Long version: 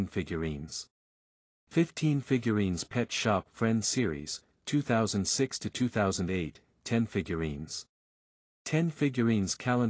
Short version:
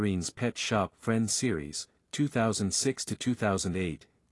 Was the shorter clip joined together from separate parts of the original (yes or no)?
no